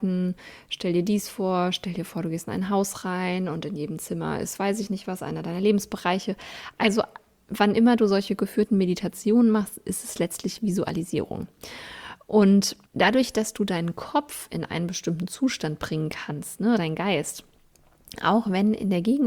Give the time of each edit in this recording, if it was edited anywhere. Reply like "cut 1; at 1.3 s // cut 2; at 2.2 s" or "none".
cut 1; at 12.9 s // cut 2; at 16.8 s

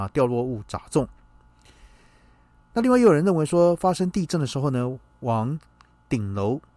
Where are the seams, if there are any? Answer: none

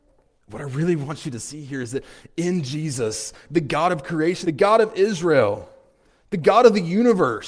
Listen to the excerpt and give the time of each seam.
cut 1; at 4.4 s

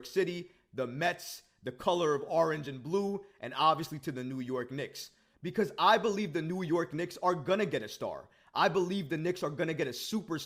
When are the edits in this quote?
cut 1; at 5.3 s

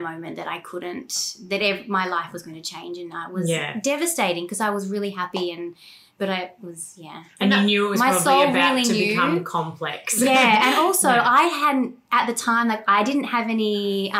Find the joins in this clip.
none

